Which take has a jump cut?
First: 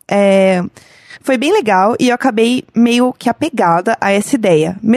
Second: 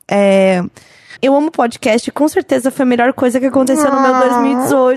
second; 1 cut; at 1.2 s

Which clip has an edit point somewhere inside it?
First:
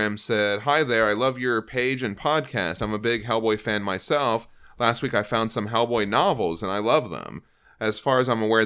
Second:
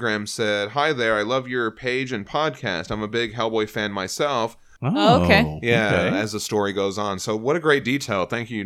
second; 1 cut; at 4.8 s

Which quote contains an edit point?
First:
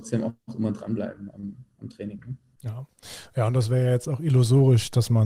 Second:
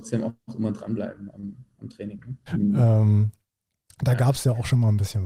second; 1 cut; at 2.5 s

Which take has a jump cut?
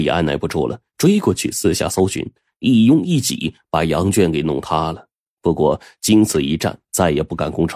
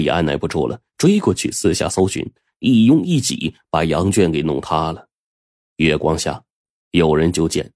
first; 2 cuts; at 5.3 s, 6.8 s

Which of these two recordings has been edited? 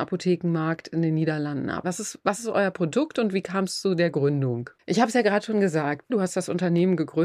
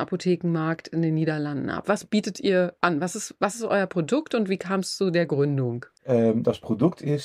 first; 3 cuts; at 1.8 s, 4.8 s, 6.1 s

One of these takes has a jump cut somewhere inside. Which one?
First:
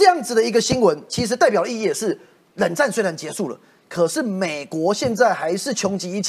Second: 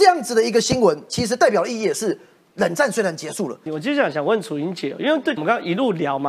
second; 2 cuts; at 3.7 s, 5.4 s

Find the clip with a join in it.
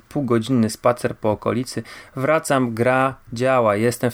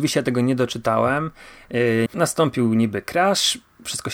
second; 1 cut; at 2.1 s

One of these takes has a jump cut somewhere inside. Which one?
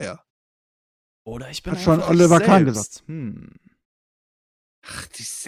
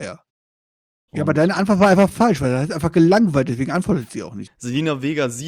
second; 2 cuts; at 1.1 s, 4.5 s

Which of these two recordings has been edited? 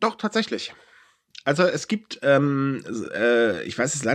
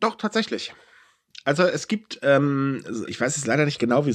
second; 1 cut; at 3.1 s

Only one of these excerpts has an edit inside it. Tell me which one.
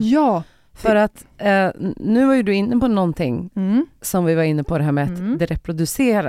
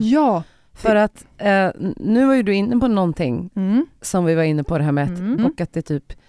second; 1 cut; at 5.4 s

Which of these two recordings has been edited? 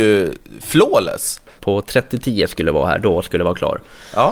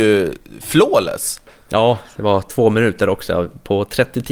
first; 1 cut; at 1.6 s

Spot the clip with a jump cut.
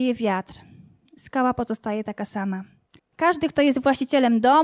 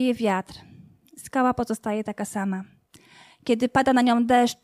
first; 1 cut; at 3.0 s

